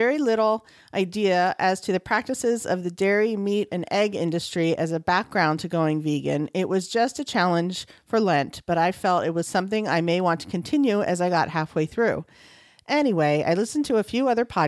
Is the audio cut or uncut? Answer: uncut